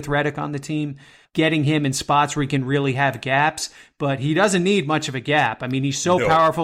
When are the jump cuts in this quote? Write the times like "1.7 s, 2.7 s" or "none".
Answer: none